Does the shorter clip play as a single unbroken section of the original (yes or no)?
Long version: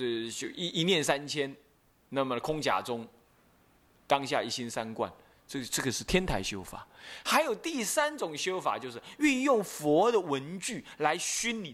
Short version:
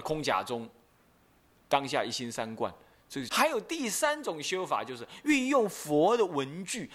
no